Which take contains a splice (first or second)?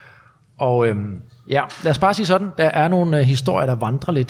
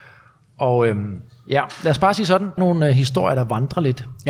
second